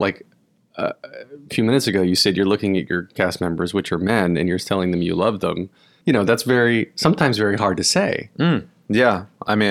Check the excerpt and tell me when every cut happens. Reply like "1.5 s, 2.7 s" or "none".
6.0 s